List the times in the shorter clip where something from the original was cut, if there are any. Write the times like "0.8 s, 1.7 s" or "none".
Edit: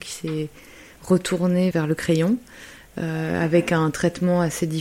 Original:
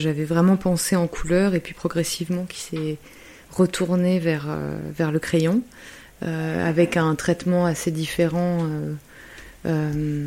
1.7 s